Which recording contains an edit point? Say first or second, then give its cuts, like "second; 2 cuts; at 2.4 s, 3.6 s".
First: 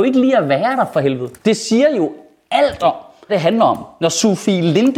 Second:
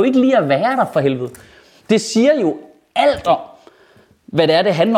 first; 2 cuts; at 1.4 s, 3.3 s